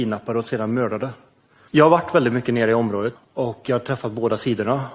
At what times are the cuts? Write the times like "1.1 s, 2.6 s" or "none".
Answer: 1.7 s, 3.2 s